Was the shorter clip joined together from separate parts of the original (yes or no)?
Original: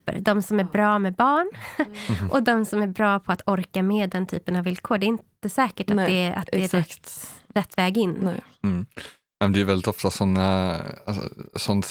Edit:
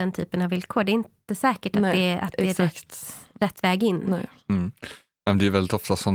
no